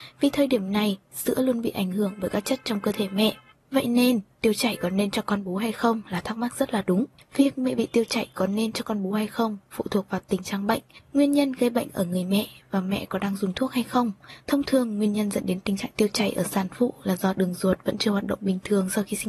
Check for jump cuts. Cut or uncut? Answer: uncut